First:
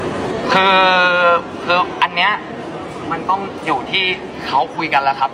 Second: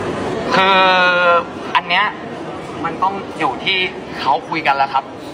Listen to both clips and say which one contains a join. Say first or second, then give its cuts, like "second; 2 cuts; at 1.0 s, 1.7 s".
second; 1 cut; at 1.7 s